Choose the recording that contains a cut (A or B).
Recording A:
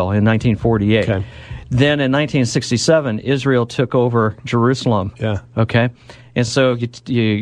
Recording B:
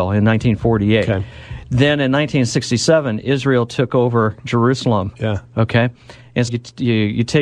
B